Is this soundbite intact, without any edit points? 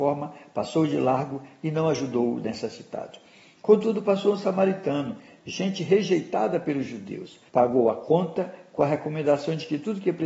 no; 1 cut; at 7.5 s

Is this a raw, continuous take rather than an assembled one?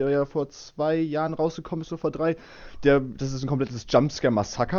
yes; 0 cuts

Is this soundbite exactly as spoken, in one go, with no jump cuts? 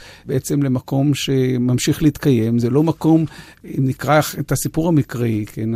yes; 0 cuts

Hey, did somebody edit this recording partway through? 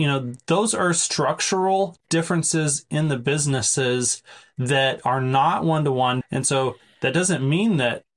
yes; 1 cut; at 6.2 s

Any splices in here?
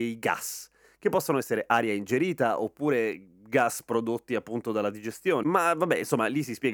yes; 1 cut; at 5.4 s

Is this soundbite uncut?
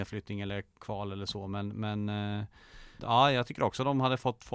no; 1 cut; at 3.0 s

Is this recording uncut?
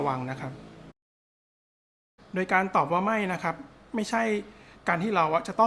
yes; 0 cuts

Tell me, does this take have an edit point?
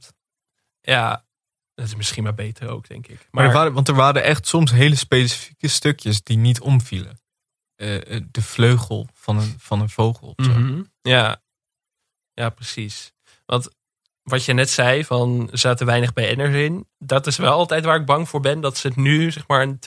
no; 0 cuts

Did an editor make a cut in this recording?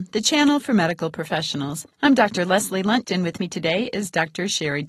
yes; 2 cuts; at 1.9 s, 3.0 s

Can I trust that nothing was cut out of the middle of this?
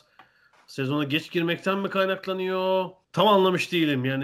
no; 1 cut; at 3.0 s

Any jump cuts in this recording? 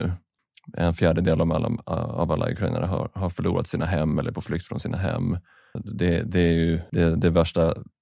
no; 0 cuts

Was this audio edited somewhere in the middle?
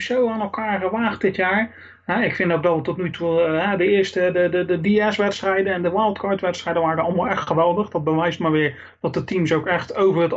no; 0 cuts

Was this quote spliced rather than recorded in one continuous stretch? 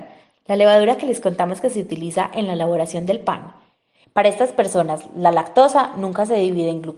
yes; 1 cut; at 4.0 s

